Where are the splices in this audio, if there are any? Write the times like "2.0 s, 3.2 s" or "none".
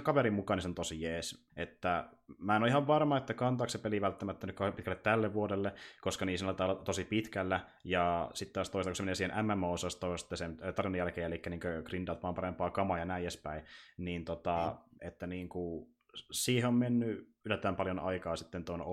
1.5 s, 15.0 s